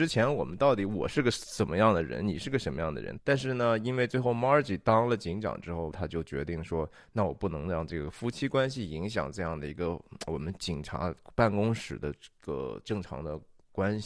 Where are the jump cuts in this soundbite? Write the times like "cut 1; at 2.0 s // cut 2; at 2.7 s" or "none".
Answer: cut 1; at 3.2 s // cut 2; at 5.9 s